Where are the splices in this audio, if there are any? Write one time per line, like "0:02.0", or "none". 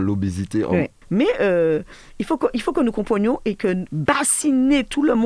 0:01.0
0:03.9